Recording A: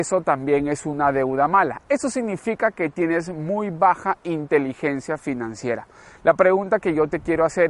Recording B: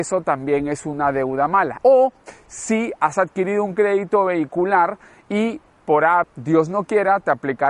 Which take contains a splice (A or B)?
B